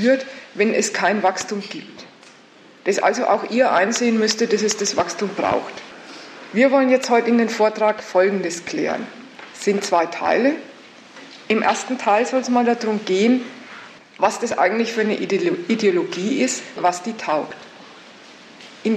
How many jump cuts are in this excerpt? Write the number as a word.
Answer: two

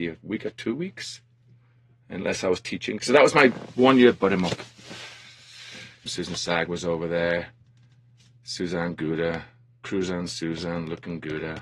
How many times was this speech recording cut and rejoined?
two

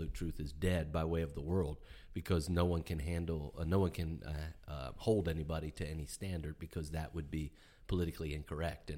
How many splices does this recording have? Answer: zero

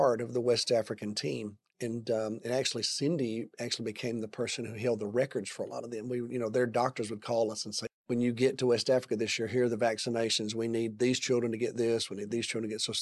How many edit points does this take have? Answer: one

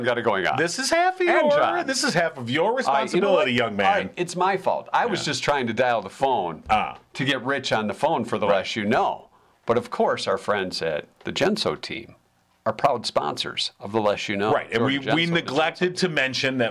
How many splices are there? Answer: zero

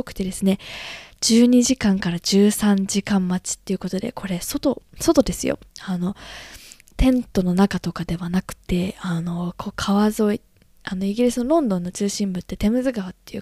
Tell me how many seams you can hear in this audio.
zero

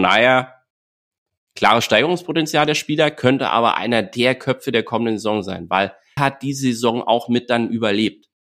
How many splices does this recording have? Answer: one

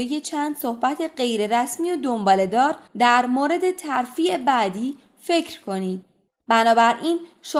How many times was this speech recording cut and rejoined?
two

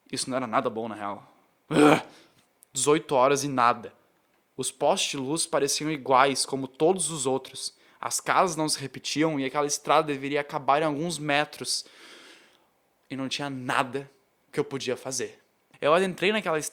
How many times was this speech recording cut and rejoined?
zero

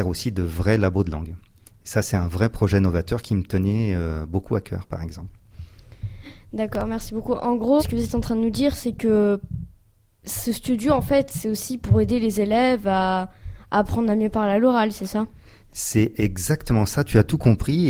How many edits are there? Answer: one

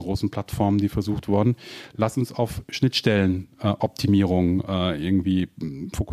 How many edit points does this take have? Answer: zero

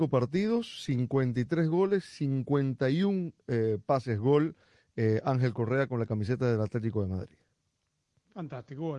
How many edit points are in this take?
zero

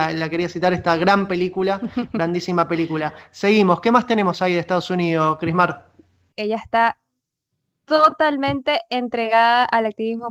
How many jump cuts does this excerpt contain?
one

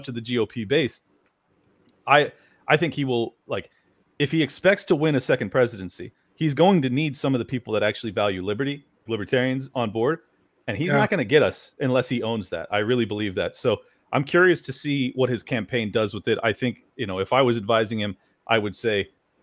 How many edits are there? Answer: one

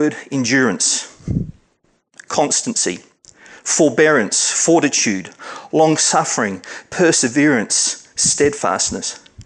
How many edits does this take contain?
zero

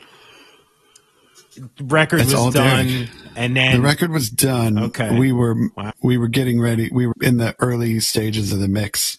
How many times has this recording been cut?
two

